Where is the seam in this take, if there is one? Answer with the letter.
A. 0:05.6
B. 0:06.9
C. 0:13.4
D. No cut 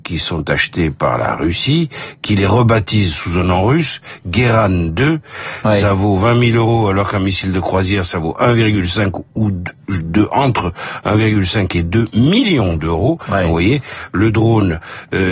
A